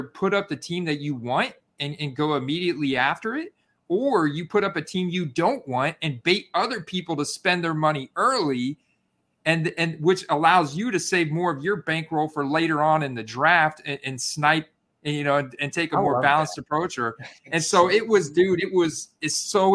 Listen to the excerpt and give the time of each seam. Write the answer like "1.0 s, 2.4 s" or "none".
none